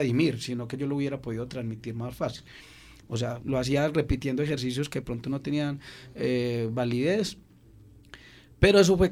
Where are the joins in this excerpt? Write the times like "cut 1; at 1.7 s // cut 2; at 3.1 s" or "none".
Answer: cut 1; at 3.0 s